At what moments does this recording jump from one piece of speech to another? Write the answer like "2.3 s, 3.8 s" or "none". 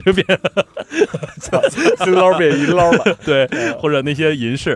none